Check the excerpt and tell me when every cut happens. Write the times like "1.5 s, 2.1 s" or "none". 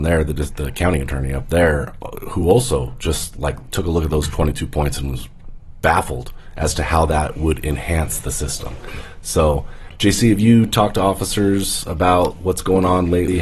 none